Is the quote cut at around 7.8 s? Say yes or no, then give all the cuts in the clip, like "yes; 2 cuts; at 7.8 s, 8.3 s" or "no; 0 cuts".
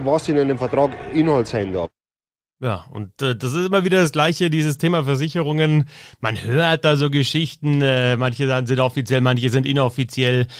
no; 0 cuts